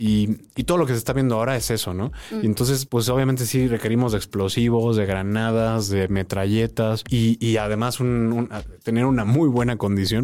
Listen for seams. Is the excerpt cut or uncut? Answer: uncut